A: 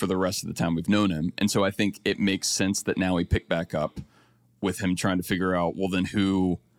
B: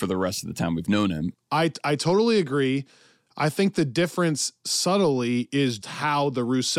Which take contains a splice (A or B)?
B